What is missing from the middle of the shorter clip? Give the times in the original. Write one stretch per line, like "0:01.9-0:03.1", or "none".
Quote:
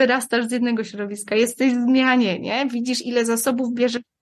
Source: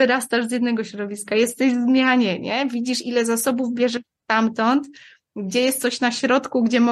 none